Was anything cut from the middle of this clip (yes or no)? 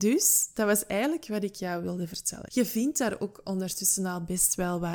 yes